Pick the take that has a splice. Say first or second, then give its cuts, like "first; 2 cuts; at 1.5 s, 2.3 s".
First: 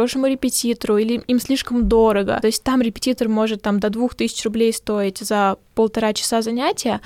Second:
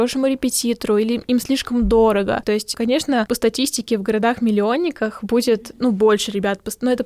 second; 1 cut; at 2.4 s